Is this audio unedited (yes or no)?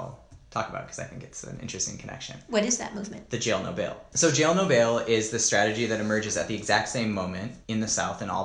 yes